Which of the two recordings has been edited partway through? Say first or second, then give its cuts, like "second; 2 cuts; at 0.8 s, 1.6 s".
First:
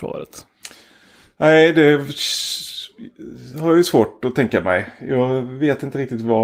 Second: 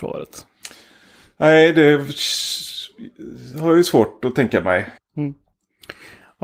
second; 1 cut; at 5.0 s